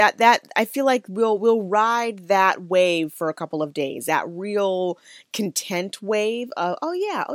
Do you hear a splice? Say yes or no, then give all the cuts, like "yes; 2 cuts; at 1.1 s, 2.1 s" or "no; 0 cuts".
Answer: no; 0 cuts